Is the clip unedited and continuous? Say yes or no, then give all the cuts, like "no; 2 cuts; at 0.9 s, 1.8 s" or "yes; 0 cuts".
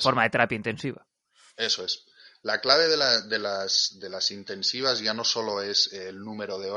yes; 0 cuts